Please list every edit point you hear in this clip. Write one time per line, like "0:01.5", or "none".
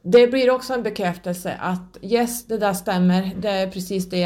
none